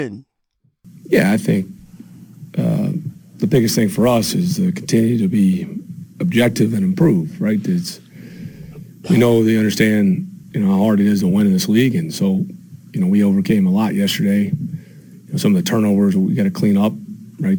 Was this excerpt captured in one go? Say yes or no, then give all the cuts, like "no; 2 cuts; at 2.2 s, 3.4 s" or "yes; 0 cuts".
yes; 0 cuts